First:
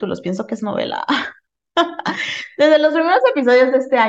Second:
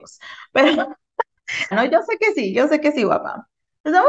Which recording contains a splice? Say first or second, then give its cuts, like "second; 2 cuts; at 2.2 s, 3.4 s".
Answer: second; 1 cut; at 1.7 s